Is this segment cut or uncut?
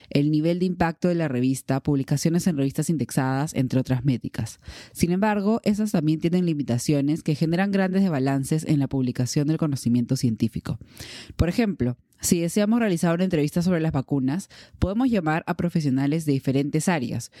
cut